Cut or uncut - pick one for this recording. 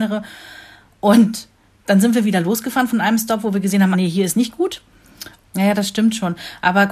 cut